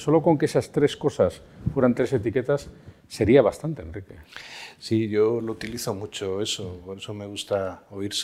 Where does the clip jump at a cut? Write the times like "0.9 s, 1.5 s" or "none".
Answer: none